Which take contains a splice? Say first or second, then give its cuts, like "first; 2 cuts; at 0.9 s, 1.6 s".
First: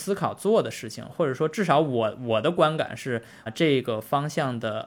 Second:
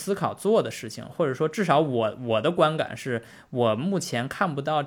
first; 1 cut; at 3.5 s